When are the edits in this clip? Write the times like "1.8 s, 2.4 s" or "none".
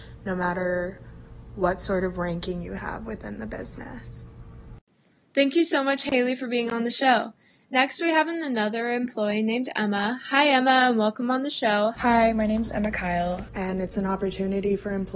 11.9 s, 13.5 s